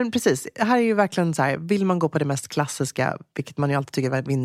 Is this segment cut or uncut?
uncut